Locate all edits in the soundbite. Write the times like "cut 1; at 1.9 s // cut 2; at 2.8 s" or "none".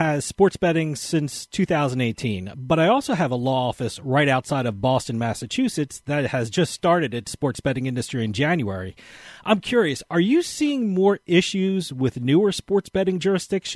none